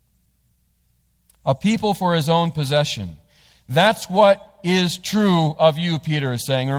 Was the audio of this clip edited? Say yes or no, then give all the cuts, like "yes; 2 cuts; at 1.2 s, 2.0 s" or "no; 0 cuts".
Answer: no; 0 cuts